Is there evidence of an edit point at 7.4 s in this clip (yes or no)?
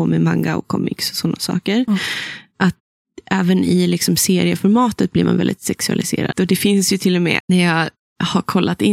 yes